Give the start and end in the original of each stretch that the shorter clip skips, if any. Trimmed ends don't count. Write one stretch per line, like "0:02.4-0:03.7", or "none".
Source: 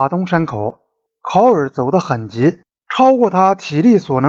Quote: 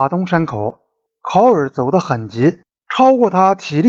none